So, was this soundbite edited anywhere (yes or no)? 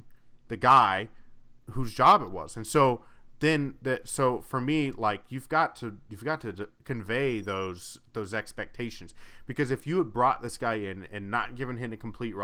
yes